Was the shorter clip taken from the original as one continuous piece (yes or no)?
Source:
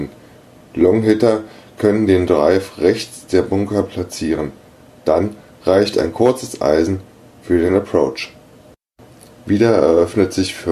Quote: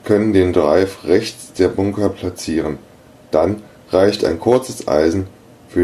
yes